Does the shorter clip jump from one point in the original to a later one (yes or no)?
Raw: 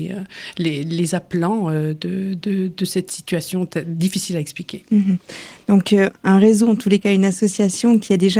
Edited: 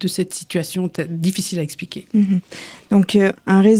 no